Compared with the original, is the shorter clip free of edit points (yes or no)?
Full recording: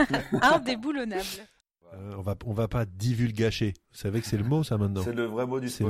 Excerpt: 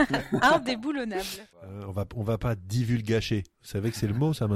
no